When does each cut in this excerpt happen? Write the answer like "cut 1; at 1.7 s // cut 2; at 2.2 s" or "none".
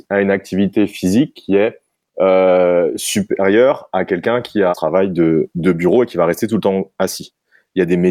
cut 1; at 4.7 s